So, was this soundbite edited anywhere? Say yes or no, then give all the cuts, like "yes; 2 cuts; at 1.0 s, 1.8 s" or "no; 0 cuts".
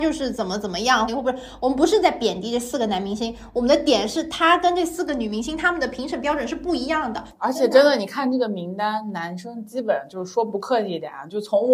yes; 1 cut; at 1.1 s